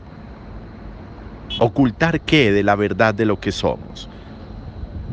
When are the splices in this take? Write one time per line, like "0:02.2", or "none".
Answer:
0:01.6